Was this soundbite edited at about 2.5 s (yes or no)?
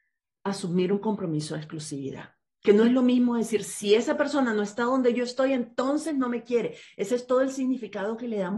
yes